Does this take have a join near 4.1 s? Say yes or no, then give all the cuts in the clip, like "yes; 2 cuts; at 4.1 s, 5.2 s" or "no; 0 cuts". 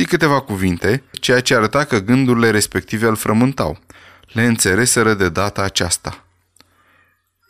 no; 1 cut; at 1.1 s